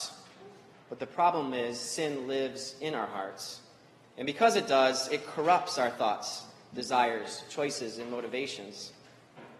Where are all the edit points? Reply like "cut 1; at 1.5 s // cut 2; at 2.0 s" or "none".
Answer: none